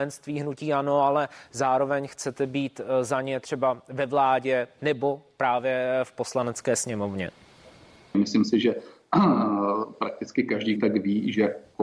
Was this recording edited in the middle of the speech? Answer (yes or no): yes